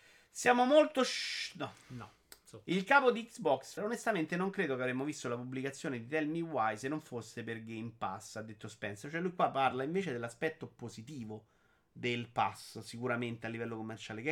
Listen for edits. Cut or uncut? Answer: cut